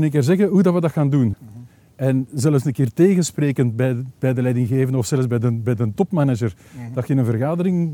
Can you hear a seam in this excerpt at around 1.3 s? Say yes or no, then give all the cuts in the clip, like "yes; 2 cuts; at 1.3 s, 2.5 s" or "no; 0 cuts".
yes; 1 cut; at 1.3 s